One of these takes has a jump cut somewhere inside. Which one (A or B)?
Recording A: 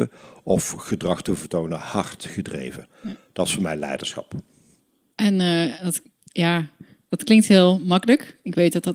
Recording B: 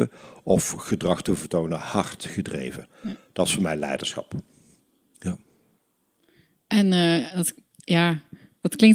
A